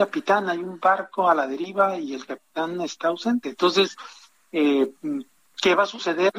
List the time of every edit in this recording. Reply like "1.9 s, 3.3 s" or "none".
none